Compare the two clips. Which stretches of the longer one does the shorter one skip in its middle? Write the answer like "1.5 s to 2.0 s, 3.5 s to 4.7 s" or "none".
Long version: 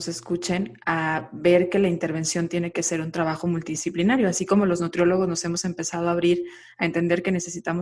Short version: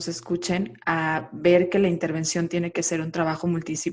none